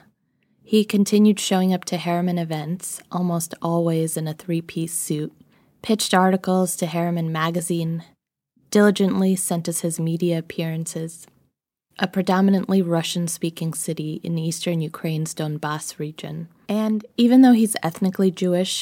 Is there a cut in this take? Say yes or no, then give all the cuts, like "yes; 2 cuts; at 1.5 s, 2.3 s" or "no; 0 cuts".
yes; 2 cuts; at 11.9 s, 16.7 s